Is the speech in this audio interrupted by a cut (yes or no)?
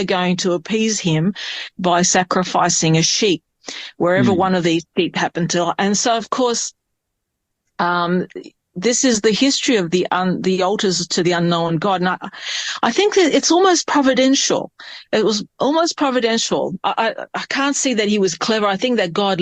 no